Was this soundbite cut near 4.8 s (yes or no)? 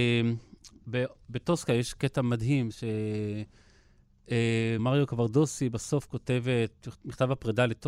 yes